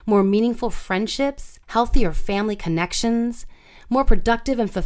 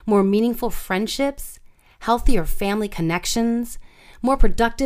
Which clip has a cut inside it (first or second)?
first